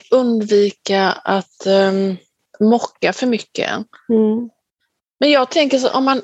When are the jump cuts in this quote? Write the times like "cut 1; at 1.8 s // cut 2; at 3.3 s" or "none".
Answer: none